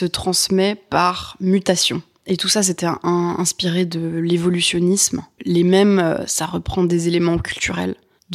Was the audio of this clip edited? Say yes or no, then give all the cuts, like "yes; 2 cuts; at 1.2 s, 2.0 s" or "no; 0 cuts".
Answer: yes; 1 cut; at 5.4 s